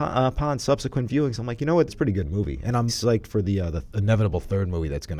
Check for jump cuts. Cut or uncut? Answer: cut